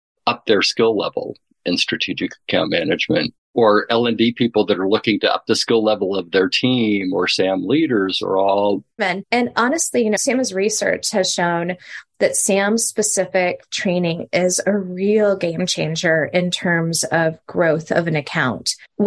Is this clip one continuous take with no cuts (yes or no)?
no